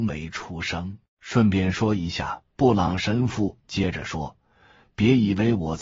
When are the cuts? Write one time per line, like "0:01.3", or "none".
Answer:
0:01.1
0:02.5